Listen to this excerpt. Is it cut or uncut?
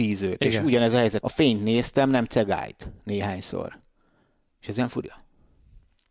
cut